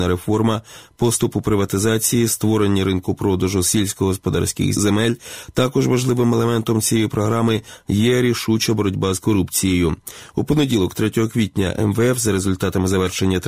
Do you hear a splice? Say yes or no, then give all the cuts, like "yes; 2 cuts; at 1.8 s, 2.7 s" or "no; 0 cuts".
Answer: yes; 1 cut; at 4.7 s